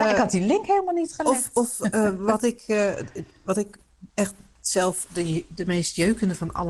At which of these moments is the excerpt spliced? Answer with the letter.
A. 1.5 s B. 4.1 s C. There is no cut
B